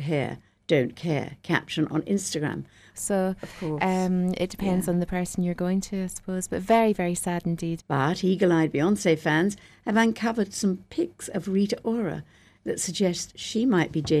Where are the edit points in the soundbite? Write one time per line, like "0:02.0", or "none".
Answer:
0:02.9
0:07.8